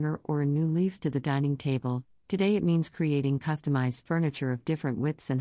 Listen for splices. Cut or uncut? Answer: uncut